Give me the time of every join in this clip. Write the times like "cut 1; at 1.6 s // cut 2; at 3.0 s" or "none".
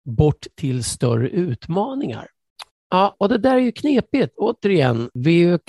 cut 1; at 2.7 s // cut 2; at 4.3 s